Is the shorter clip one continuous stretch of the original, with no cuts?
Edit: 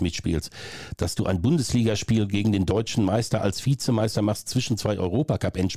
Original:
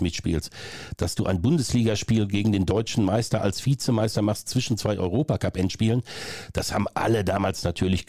yes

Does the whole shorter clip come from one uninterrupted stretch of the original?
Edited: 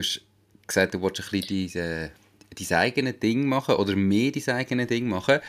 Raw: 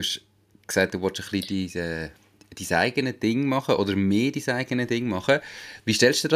yes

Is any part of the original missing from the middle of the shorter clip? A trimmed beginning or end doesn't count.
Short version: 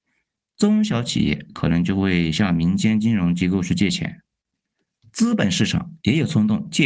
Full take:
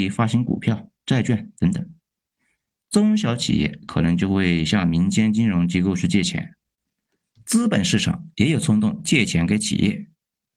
no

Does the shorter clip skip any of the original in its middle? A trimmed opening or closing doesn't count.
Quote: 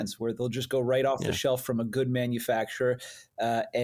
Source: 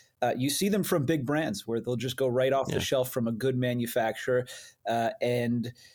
no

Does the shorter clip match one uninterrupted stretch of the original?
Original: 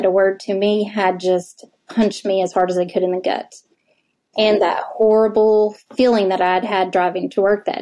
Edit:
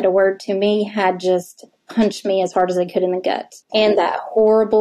no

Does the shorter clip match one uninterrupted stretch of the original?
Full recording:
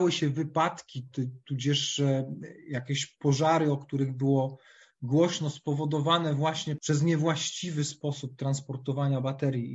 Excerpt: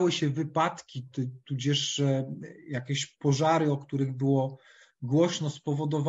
yes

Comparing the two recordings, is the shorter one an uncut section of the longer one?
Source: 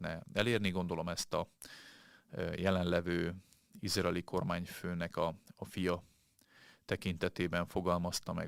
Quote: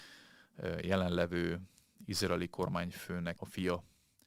no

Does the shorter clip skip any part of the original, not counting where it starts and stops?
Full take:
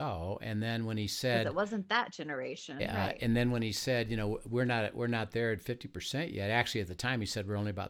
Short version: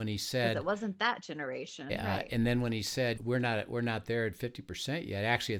yes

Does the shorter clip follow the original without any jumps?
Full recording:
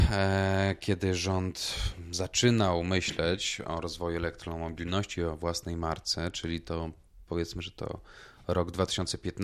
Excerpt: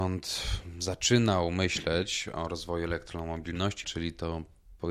no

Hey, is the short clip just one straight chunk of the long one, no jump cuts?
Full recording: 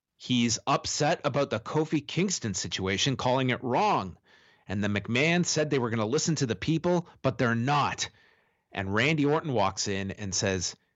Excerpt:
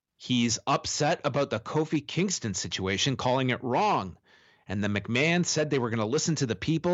yes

